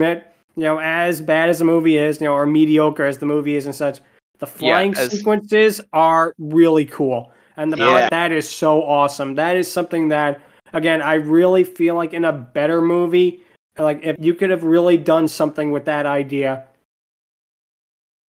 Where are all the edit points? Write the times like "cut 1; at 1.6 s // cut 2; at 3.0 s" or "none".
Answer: cut 1; at 8.1 s // cut 2; at 14.2 s